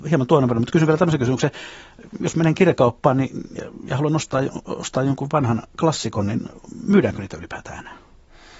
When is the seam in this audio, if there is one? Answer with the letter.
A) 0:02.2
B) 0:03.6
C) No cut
C